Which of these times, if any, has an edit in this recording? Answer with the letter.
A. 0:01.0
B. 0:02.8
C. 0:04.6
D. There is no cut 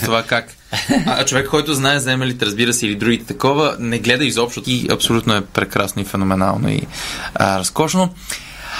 C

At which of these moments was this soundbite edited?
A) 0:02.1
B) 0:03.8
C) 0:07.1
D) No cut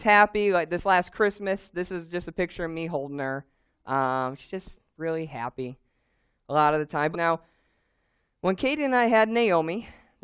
C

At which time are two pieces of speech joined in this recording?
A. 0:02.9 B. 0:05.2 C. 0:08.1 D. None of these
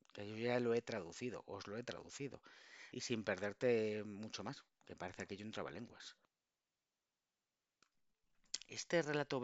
A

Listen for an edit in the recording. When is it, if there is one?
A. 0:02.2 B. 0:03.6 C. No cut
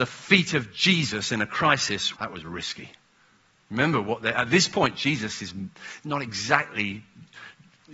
A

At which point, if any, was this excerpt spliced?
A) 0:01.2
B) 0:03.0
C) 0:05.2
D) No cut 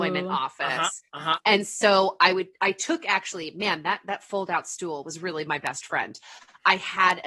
D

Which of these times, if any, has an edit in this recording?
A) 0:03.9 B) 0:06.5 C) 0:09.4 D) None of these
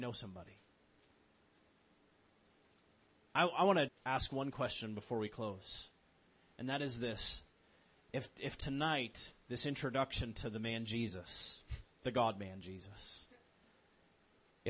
A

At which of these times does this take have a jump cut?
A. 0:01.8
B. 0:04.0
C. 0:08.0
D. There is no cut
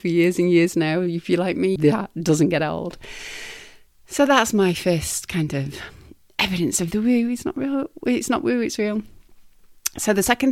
A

